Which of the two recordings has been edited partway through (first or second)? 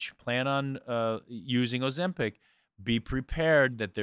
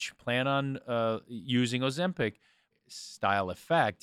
second